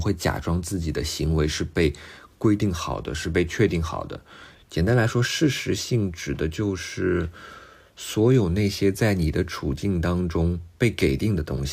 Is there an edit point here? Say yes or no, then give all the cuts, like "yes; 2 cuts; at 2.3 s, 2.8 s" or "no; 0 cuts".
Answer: yes; 1 cut; at 4.5 s